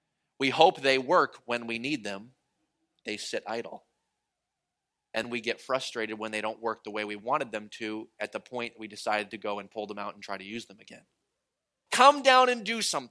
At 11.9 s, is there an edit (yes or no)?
yes